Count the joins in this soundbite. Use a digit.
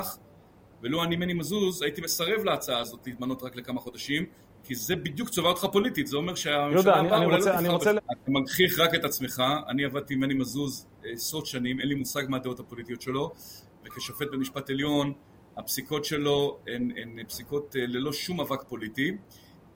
1